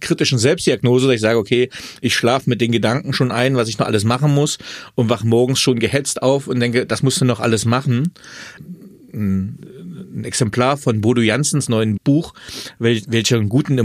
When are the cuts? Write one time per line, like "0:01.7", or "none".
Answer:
0:08.6
0:12.0